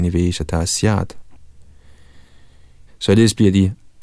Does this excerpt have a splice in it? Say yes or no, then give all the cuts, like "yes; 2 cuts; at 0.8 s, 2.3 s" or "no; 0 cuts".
yes; 1 cut; at 2.9 s